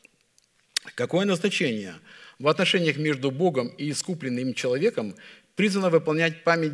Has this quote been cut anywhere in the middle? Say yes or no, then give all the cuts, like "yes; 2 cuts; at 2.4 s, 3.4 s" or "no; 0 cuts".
no; 0 cuts